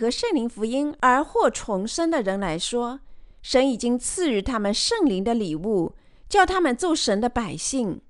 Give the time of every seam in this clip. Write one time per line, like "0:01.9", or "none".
none